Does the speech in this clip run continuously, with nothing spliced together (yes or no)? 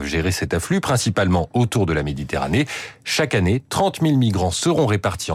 yes